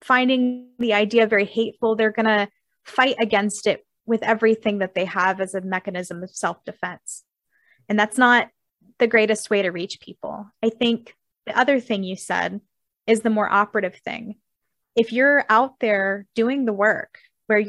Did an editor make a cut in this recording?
no; 0 cuts

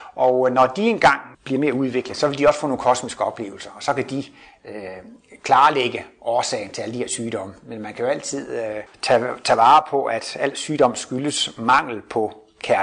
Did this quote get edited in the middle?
yes; 2 cuts; at 1.3 s, 8.9 s

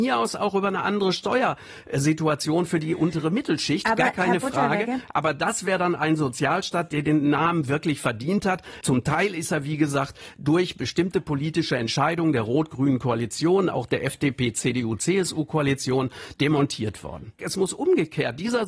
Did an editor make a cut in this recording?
yes; 2 cuts; at 8.8 s, 17.4 s

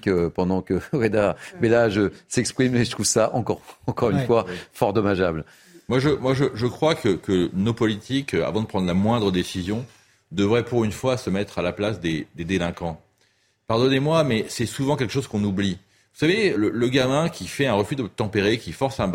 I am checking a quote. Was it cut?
yes; 1 cut; at 16.5 s

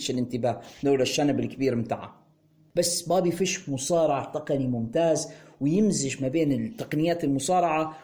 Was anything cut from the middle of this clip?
no; 0 cuts

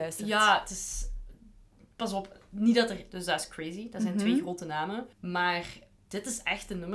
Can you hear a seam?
yes; 2 cuts; at 3.1 s, 5.1 s

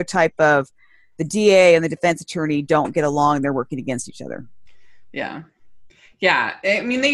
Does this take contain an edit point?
no; 0 cuts

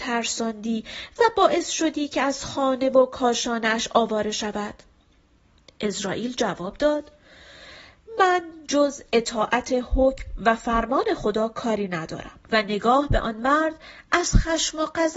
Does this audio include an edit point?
yes; 1 cut; at 12.4 s

